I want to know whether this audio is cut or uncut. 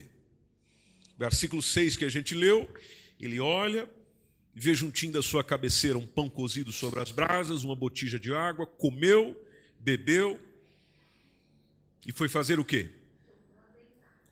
uncut